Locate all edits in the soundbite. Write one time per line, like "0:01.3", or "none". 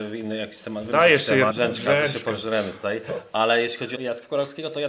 0:01.5
0:03.9